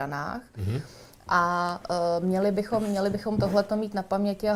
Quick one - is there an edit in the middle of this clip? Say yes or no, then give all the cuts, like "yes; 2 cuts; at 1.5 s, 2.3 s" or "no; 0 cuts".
no; 0 cuts